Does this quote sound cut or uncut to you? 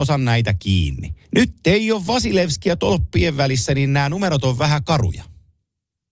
cut